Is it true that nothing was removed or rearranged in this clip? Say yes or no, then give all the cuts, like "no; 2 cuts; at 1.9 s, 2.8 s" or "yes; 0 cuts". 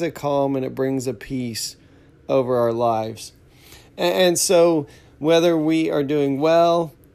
yes; 0 cuts